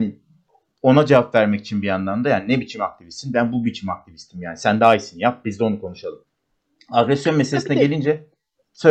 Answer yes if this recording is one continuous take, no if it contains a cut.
yes